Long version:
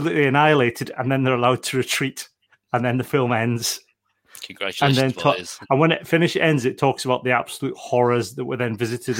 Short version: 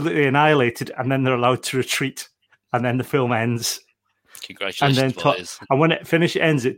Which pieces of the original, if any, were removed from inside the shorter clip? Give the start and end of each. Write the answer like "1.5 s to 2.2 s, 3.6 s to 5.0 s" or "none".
none